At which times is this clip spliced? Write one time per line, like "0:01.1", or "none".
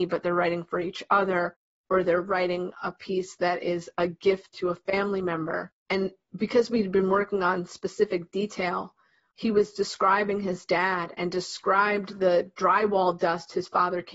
0:05.8
0:09.3